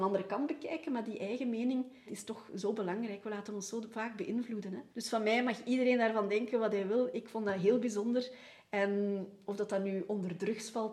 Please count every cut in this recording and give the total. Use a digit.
2